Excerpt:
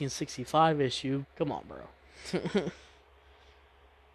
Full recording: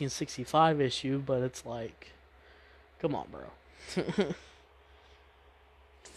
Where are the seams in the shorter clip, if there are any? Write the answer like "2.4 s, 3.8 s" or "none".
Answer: 1.2 s